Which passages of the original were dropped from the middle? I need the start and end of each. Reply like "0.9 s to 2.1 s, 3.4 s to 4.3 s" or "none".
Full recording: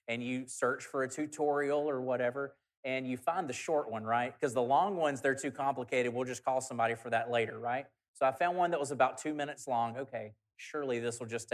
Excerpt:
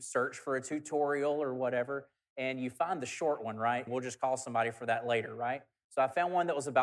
4.3 s to 6.1 s